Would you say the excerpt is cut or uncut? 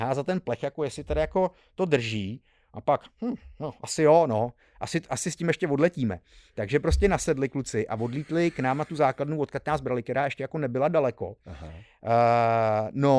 uncut